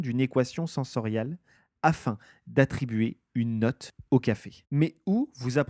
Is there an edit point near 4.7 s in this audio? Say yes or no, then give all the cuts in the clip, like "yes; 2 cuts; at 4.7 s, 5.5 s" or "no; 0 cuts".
no; 0 cuts